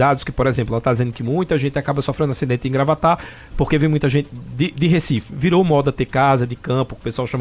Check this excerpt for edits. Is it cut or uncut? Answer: uncut